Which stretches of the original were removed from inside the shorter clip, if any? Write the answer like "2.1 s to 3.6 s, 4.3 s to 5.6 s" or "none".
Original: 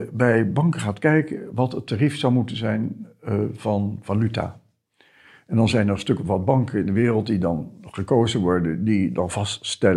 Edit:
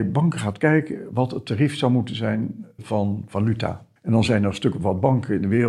3.2 s to 3.5 s, 4.7 s to 5.4 s